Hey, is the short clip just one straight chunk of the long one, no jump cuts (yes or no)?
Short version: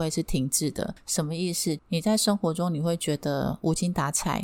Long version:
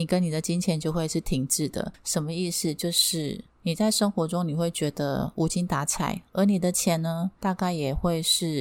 no